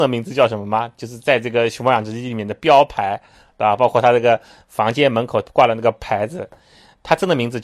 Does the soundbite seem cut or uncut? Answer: uncut